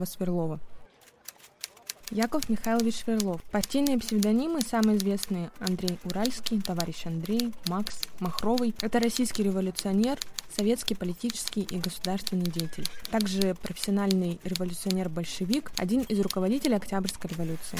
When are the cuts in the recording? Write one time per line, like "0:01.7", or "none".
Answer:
0:05.5